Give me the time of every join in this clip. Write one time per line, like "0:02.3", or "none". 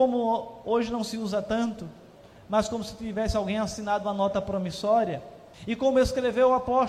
0:05.5